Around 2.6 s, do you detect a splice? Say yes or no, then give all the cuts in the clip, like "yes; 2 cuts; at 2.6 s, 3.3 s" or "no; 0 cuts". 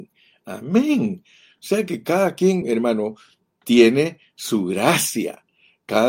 no; 0 cuts